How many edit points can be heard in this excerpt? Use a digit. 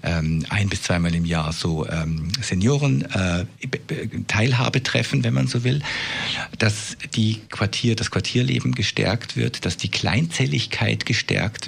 0